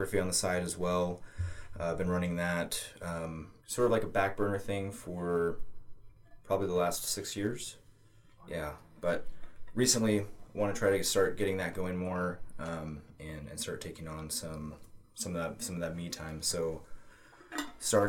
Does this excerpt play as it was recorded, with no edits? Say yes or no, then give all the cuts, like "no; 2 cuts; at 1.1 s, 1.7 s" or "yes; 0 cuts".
no; 2 cuts; at 3.6 s, 8.5 s